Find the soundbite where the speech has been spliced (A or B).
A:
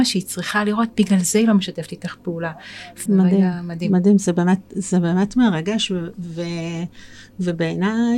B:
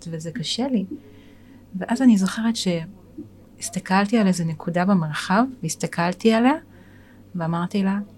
A